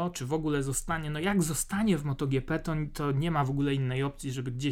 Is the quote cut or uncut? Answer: uncut